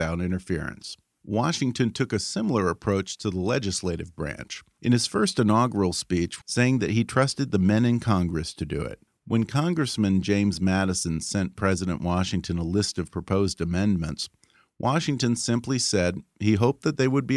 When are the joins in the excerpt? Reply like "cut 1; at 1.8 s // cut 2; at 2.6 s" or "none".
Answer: cut 1; at 6.4 s